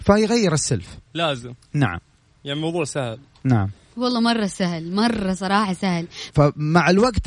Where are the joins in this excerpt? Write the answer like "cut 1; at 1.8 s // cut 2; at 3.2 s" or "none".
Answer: cut 1; at 1.1 s // cut 2; at 6.3 s